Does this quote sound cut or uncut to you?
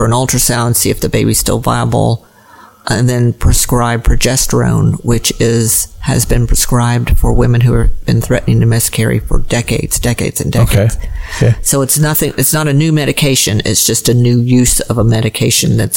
uncut